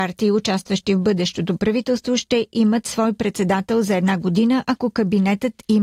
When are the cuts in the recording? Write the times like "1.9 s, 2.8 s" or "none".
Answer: none